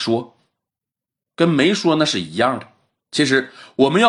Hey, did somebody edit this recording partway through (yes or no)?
yes